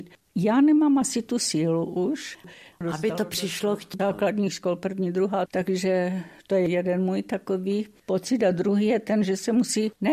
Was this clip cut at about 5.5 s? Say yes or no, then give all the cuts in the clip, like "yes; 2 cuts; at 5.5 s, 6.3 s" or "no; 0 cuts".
yes; 2 cuts; at 4.0 s, 5.5 s